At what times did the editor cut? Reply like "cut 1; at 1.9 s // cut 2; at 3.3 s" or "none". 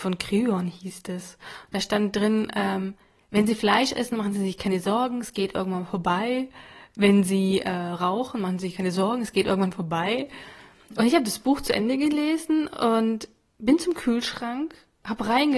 none

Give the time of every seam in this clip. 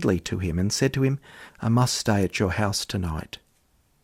cut 1; at 1.5 s

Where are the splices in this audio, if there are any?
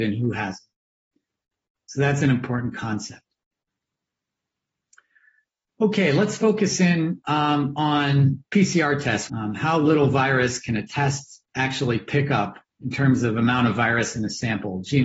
cut 1; at 9.3 s // cut 2; at 11.5 s // cut 3; at 12.7 s

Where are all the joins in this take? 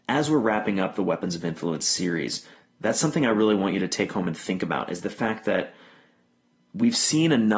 none

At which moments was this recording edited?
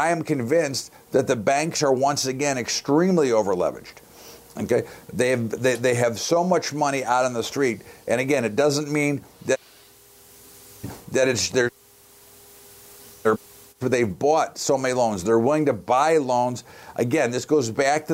none

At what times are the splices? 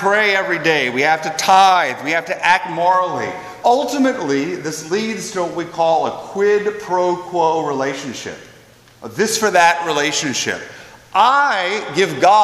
cut 1; at 3.6 s

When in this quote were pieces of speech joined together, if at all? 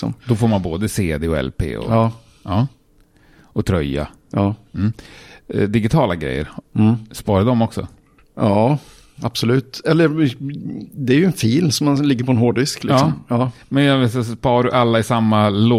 none

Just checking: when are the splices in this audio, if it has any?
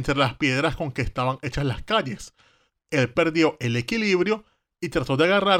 cut 1; at 2.7 s

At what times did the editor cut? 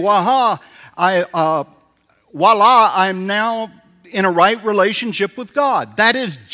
none

